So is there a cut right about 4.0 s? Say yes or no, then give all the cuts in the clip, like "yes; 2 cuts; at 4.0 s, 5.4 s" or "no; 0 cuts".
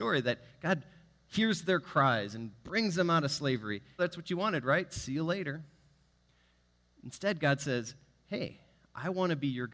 yes; 1 cut; at 4.0 s